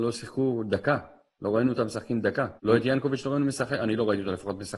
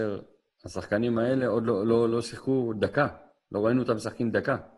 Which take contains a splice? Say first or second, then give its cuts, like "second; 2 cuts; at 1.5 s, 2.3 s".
first; 1 cut; at 2.6 s